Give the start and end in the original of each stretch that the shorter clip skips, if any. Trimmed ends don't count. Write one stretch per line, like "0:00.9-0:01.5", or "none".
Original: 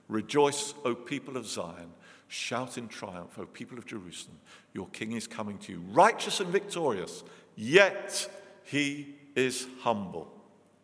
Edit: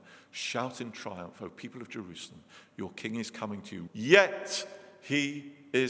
0:05.8-0:07.5